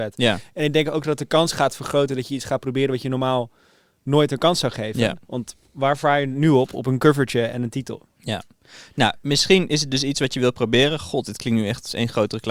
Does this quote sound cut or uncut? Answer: uncut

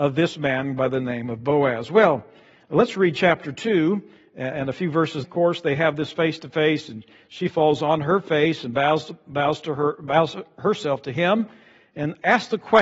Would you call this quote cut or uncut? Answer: cut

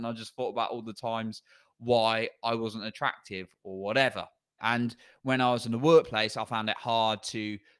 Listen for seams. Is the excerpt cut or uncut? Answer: cut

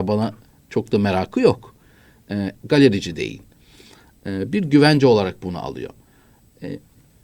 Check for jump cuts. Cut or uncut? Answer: cut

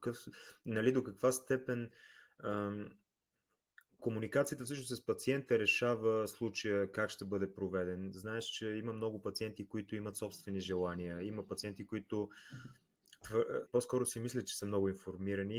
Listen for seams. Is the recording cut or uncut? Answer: cut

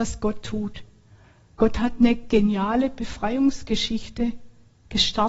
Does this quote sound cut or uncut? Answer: uncut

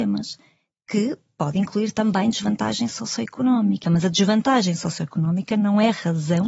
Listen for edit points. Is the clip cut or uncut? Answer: cut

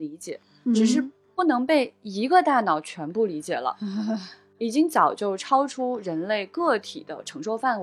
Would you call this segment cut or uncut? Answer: uncut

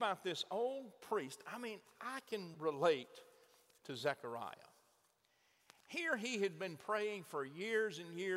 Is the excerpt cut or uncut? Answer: cut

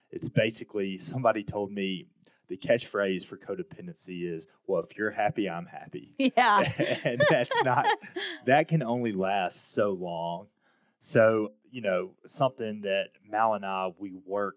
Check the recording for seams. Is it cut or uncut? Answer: uncut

